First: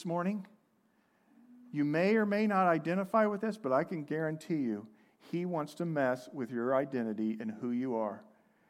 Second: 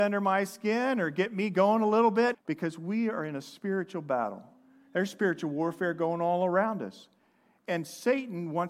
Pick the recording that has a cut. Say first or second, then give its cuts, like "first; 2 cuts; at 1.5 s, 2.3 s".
second; 1 cut; at 2.3 s